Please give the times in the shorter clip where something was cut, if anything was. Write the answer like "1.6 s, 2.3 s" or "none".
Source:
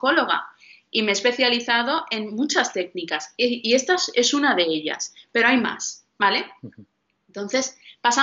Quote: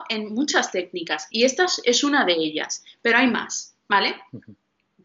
1.3 s

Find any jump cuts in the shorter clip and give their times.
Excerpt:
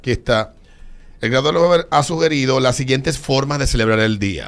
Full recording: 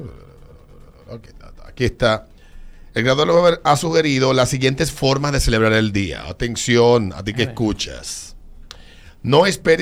none

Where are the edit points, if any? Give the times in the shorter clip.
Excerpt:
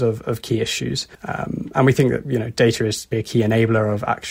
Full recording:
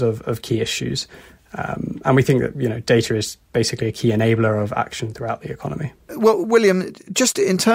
1.1 s, 3.1 s

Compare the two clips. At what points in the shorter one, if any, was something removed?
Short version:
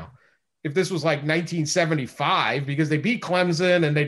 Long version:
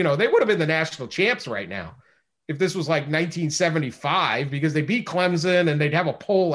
none

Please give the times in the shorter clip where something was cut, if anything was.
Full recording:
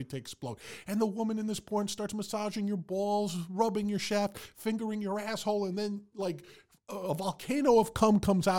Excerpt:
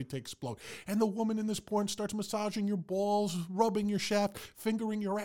none

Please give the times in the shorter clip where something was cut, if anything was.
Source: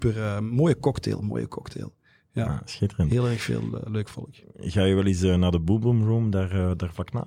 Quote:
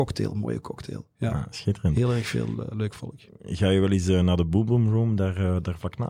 1.1 s

